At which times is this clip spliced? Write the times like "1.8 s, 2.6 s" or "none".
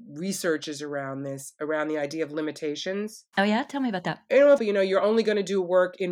4.6 s